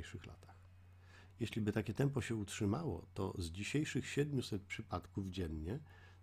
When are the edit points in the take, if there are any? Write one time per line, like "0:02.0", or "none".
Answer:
0:01.3